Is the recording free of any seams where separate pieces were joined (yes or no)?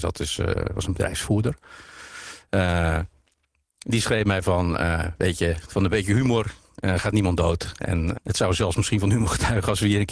no